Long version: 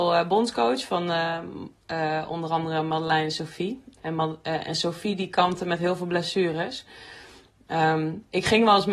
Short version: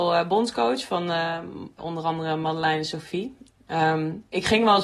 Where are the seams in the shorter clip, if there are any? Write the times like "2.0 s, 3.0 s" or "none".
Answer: 1.8 s, 3.5 s